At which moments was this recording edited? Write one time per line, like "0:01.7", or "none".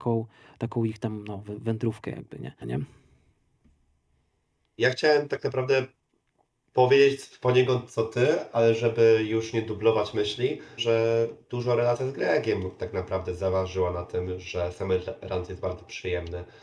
0:02.6
0:10.8

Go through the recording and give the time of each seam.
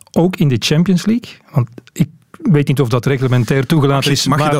none

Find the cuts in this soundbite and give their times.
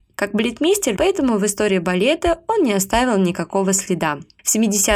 0:01.0

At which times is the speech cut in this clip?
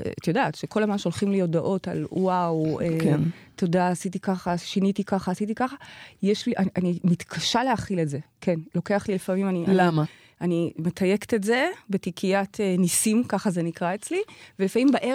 none

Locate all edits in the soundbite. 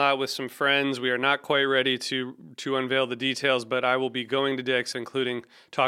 0:04.9

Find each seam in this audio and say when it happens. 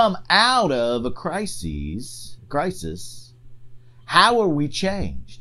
none

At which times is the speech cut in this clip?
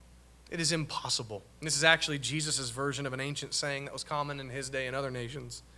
0:01.5

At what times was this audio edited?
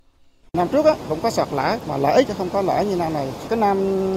none

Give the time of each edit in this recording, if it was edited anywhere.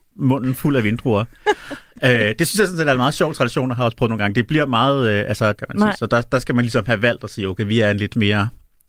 0:05.5

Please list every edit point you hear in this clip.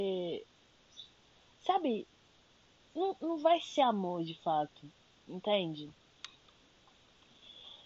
none

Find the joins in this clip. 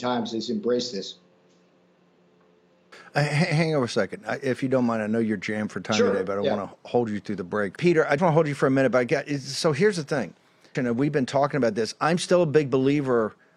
0:08.2
0:10.7

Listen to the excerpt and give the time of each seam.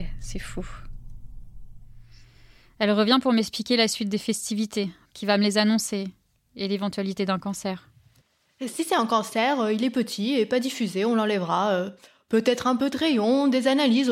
0:05.1

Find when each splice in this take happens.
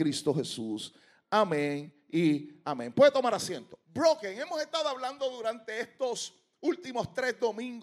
0:03.8

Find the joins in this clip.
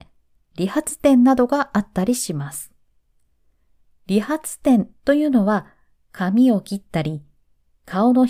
none

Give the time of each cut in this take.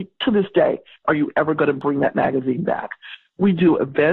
0:01.0

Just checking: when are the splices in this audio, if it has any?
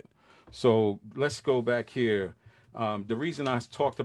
0:03.1

